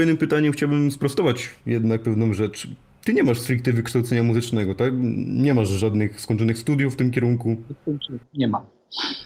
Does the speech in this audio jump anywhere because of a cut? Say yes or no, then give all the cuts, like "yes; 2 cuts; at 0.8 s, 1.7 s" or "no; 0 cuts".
no; 0 cuts